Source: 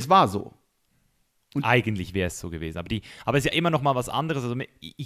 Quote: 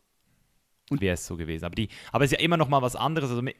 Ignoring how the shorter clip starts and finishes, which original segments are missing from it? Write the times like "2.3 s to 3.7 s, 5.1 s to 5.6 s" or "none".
1.6 s to 2.1 s